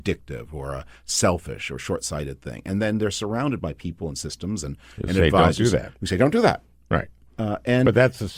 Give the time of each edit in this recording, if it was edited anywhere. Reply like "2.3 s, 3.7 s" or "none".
none

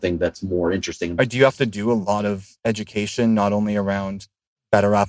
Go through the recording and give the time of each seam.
1.2 s

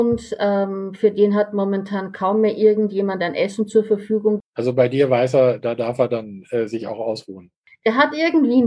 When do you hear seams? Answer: 4.4 s

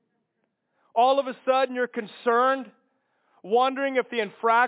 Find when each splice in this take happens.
none

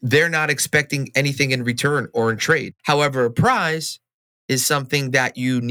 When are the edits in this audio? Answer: 2.8 s

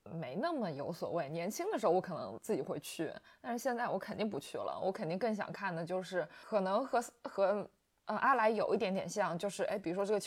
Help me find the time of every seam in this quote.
none

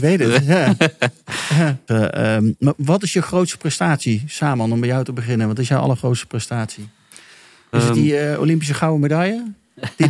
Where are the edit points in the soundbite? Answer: 1.9 s, 7.7 s

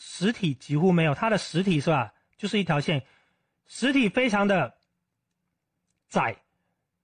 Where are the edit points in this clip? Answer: none

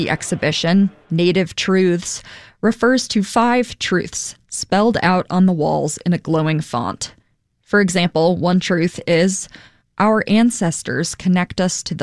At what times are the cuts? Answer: none

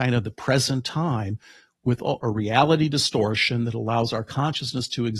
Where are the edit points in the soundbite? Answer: 2.2 s

